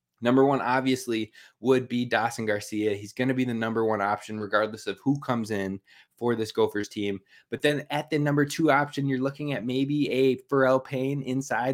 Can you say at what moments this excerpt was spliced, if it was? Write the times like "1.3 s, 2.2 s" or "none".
none